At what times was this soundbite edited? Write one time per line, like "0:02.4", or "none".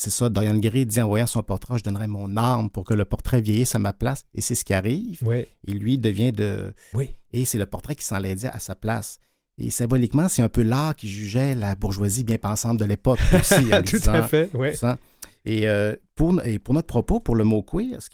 0:06.9